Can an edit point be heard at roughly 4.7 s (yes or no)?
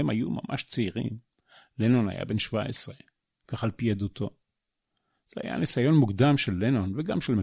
no